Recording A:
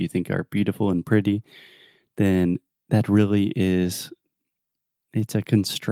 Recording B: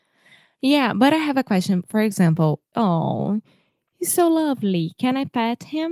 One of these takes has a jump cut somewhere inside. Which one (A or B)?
B